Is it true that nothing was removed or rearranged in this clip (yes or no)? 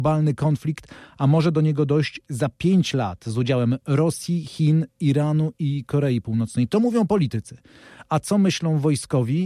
yes